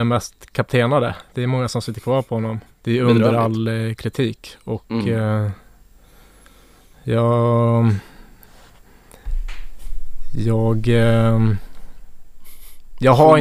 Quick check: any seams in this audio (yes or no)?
yes